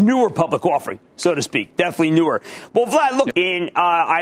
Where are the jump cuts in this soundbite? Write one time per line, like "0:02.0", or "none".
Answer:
0:03.3